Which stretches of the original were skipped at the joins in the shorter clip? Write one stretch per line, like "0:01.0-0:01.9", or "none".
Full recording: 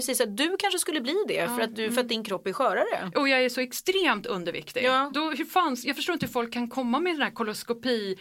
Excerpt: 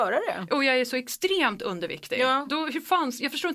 none